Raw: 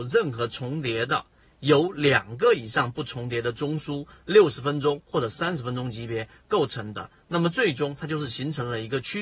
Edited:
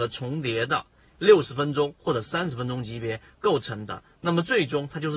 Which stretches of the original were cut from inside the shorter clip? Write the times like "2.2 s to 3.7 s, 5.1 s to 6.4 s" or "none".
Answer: 1.5 s to 4.2 s